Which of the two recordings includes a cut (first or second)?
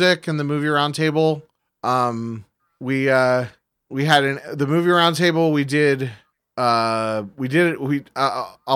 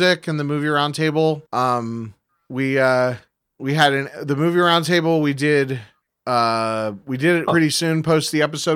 second